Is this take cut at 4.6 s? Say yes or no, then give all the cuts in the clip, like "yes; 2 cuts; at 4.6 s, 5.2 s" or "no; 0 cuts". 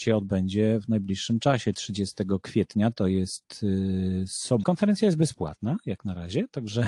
yes; 2 cuts; at 1.7 s, 4.6 s